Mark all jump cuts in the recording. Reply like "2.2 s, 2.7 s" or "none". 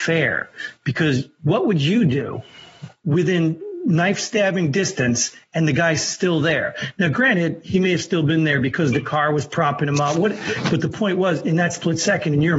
none